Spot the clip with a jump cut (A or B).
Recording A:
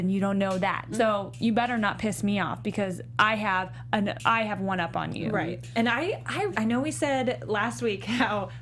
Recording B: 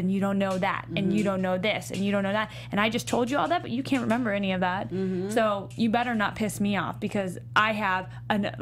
A